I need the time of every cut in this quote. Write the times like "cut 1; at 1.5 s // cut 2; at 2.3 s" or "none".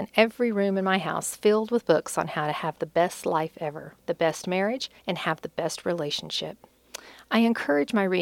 cut 1; at 5.0 s